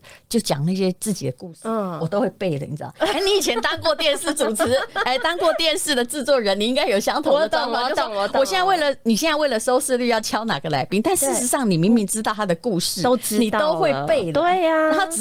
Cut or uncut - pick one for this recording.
uncut